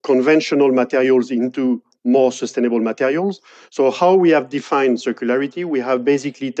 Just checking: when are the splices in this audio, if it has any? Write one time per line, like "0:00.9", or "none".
0:03.6